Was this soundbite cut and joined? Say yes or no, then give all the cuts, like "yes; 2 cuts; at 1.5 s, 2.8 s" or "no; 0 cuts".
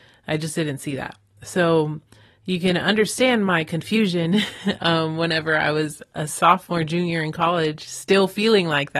no; 0 cuts